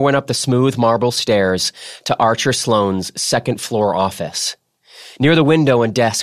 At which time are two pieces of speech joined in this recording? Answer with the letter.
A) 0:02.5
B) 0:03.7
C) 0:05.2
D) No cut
C